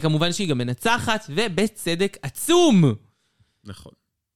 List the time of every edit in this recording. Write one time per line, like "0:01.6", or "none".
none

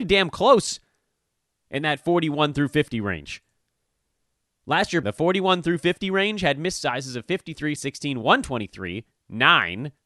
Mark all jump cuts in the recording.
0:05.0
0:07.8

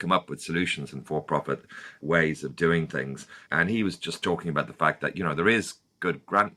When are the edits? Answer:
none

